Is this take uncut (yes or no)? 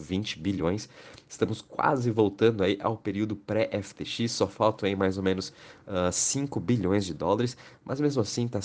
yes